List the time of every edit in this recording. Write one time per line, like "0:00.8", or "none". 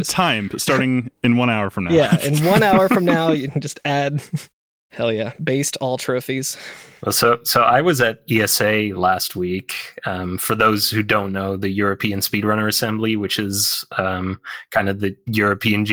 none